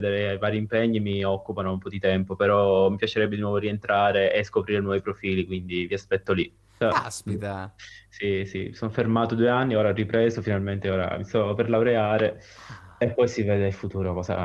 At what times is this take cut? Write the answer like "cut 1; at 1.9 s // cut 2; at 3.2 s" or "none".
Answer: cut 1; at 6.8 s